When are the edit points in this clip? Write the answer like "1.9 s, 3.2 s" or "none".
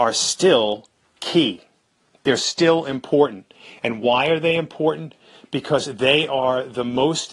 none